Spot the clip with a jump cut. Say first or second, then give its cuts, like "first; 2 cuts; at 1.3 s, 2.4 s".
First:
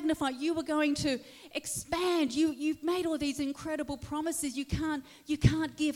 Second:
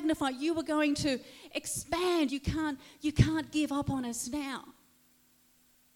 second; 1 cut; at 2.3 s